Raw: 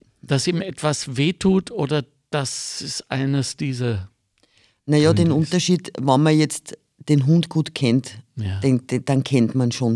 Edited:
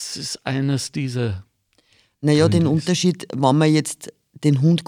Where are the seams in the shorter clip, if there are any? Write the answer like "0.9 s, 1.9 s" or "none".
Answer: none